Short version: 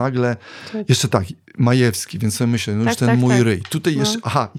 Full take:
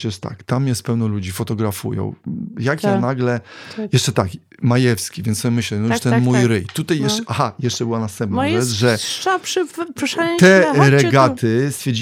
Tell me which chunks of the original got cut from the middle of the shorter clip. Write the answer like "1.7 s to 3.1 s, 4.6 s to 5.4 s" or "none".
none